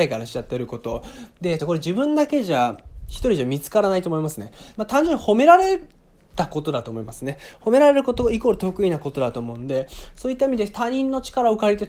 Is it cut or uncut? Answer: cut